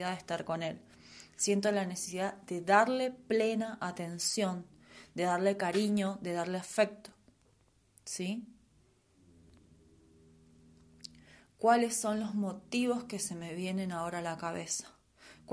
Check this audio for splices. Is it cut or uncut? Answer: uncut